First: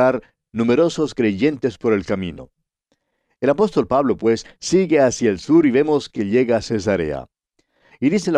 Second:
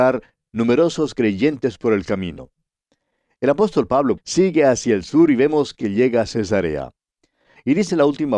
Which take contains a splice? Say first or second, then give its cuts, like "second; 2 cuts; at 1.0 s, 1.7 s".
second; 1 cut; at 4.2 s